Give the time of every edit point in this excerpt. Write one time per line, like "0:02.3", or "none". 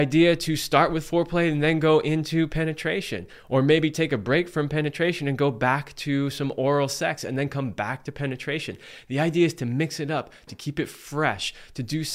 0:10.5